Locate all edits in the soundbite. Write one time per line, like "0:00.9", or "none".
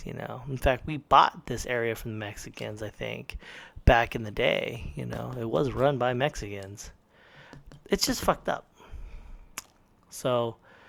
none